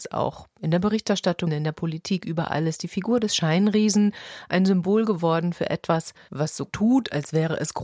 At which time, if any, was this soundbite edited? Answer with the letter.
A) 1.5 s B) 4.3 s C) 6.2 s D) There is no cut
A